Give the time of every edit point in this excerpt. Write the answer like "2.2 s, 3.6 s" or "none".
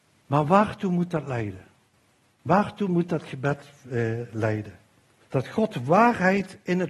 5.2 s

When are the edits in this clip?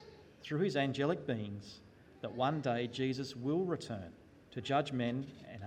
4.5 s

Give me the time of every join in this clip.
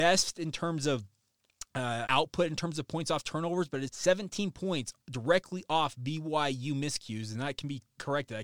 2.1 s, 3.9 s

